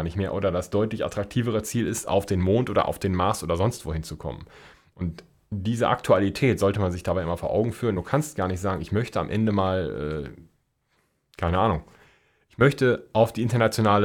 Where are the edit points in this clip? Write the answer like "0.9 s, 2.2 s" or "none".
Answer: 8.0 s